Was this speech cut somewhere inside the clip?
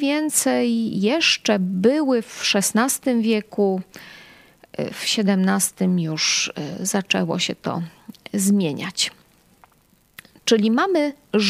no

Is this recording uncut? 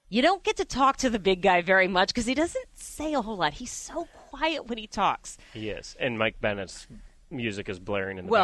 yes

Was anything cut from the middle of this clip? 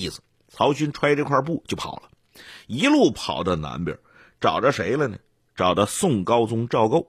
no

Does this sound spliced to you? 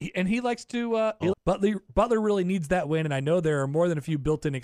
yes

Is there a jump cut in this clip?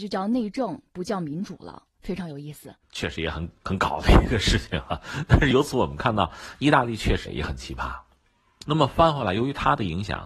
yes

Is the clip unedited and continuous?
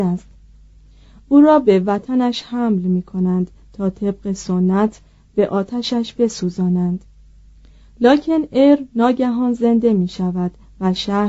yes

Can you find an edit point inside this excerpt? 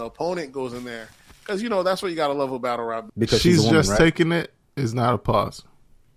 yes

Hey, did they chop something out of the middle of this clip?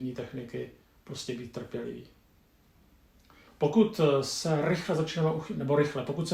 yes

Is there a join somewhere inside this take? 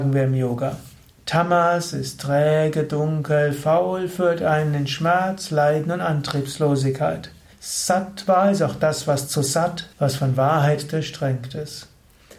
yes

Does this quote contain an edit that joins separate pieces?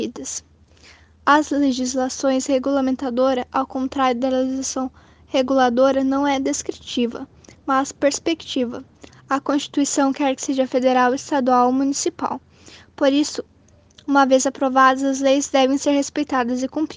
yes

